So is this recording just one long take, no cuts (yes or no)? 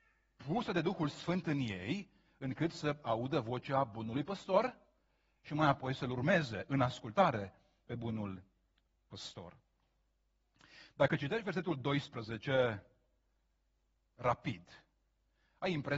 yes